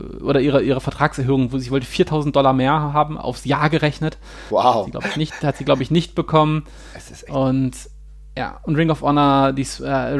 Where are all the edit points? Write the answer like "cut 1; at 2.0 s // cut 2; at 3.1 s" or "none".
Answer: none